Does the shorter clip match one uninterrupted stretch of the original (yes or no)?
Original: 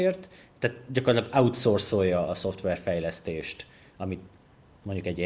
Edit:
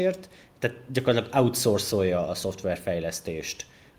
yes